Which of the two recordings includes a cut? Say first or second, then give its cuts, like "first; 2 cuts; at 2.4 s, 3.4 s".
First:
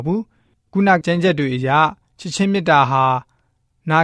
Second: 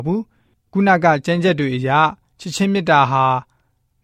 first; 1 cut; at 1.0 s